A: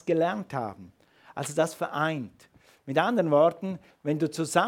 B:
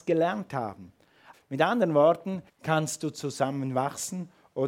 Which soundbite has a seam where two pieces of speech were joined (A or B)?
B